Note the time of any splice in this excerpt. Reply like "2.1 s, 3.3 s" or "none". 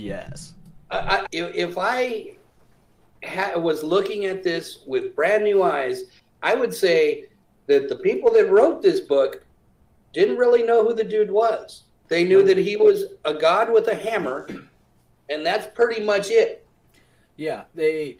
1.3 s